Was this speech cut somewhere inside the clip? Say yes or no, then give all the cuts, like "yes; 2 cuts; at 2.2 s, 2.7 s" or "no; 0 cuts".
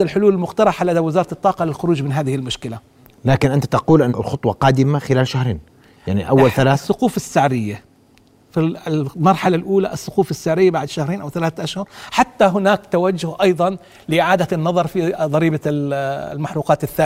yes; 1 cut; at 4.1 s